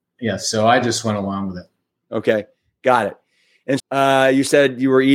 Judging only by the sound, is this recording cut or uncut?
cut